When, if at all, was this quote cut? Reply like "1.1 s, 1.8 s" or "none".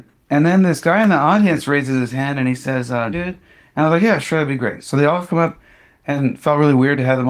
3.1 s